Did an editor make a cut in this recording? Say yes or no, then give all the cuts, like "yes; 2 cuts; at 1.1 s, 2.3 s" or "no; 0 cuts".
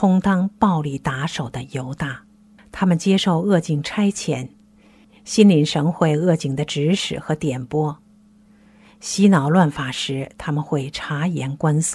yes; 1 cut; at 2.6 s